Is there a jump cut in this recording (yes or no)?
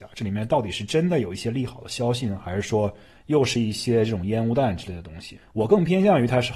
no